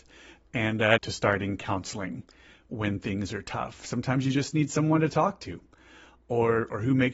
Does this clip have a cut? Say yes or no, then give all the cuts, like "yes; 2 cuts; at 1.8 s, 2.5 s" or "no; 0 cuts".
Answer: yes; 1 cut; at 1.0 s